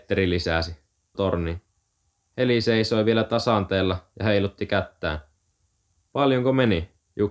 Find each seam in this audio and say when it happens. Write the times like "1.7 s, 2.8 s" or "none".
1.1 s, 6.1 s